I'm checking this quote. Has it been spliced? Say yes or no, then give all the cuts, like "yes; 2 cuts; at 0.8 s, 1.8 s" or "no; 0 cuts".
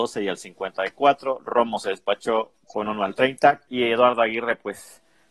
yes; 1 cut; at 3.7 s